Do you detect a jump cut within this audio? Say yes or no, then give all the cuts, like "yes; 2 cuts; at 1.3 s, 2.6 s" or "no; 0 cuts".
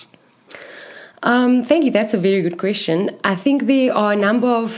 no; 0 cuts